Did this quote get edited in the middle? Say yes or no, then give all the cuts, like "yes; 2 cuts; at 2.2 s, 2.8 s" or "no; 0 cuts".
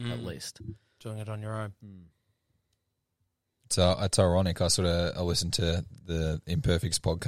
yes; 1 cut; at 3.6 s